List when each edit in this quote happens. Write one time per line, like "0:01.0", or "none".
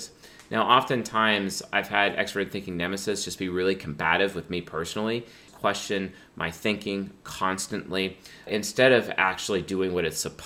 0:05.5
0:08.5